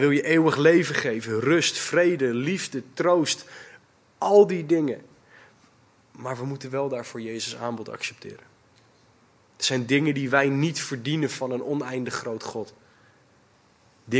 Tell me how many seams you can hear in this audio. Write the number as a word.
zero